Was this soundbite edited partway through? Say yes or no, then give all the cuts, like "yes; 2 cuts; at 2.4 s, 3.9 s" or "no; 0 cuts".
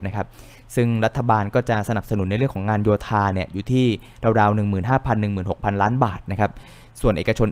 no; 0 cuts